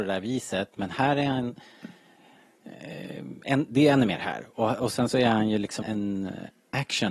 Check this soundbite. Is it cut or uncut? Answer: cut